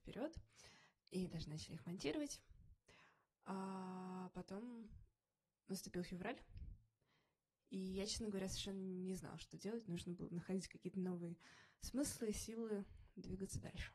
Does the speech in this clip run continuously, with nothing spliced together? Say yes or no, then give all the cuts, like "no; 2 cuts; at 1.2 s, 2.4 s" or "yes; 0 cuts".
yes; 0 cuts